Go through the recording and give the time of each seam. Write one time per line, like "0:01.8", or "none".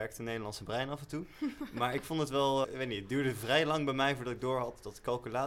0:02.6

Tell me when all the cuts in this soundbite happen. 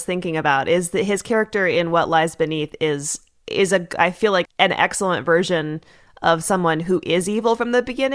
0:04.4

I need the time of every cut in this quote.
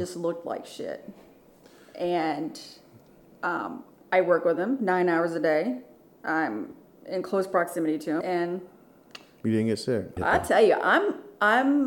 0:08.2
0:10.2

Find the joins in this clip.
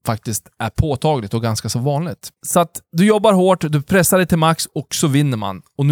0:02.4

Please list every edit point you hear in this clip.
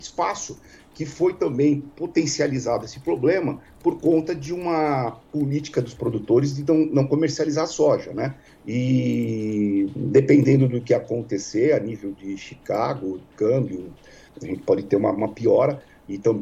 0:08.5
0:14.3

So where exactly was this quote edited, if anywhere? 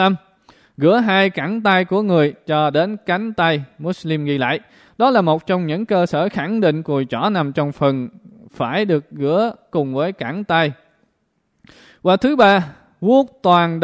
none

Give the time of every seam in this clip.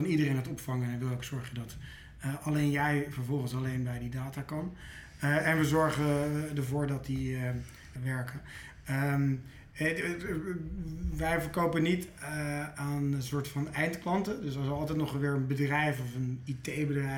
0:08.0

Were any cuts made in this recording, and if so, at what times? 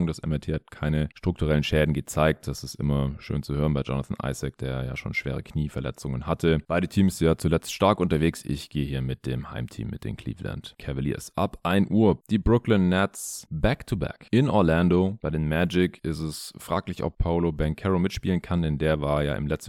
0:06.7
0:15.2

